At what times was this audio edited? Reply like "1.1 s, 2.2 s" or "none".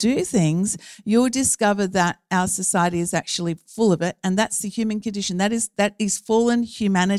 none